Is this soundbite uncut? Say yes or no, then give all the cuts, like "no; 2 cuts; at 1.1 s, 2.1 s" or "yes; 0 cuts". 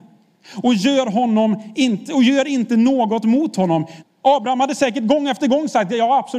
no; 1 cut; at 4.0 s